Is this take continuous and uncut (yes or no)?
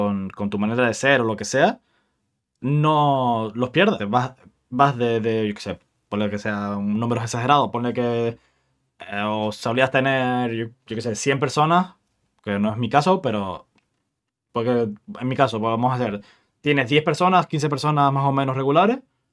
no